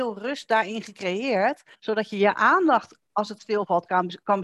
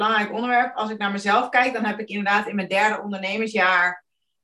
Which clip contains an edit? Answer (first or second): first